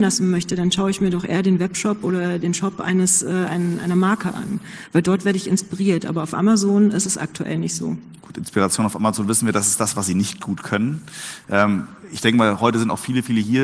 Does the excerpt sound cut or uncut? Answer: cut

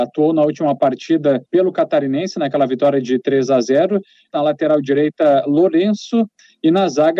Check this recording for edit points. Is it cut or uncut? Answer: cut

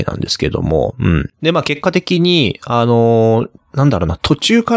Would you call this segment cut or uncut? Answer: cut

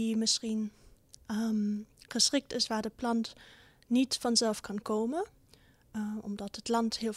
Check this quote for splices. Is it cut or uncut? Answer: uncut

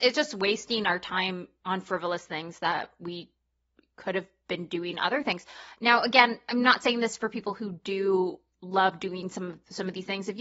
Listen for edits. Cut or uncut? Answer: uncut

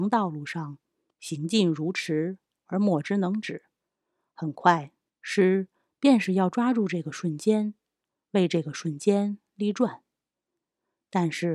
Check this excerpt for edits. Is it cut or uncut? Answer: cut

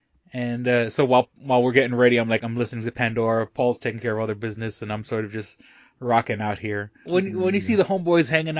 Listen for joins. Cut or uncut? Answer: cut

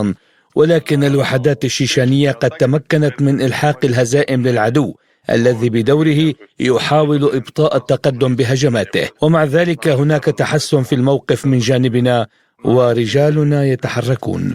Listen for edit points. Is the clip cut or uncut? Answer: cut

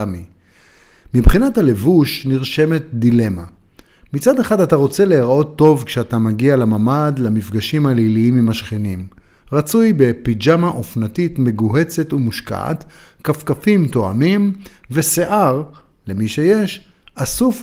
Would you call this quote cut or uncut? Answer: uncut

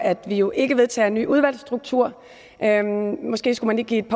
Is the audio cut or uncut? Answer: uncut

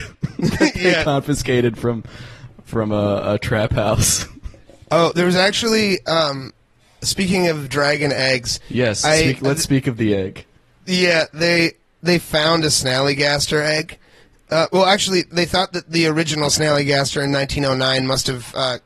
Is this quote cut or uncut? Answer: uncut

